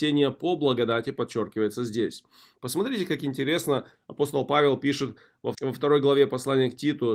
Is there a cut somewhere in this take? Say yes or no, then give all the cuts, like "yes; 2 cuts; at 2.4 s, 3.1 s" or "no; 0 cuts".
yes; 2 cuts; at 2.6 s, 5.5 s